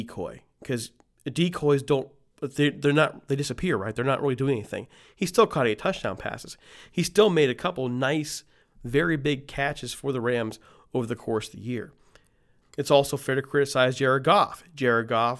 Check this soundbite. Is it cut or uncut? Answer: cut